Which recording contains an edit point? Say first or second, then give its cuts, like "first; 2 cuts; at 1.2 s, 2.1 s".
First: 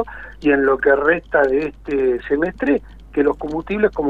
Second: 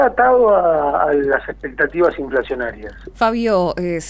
second; 1 cut; at 3.1 s